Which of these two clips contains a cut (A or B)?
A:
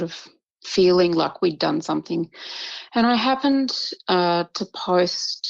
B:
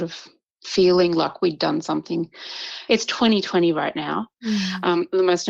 B